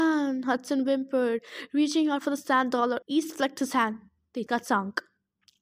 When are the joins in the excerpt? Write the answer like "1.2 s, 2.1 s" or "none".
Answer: 3.0 s, 4.5 s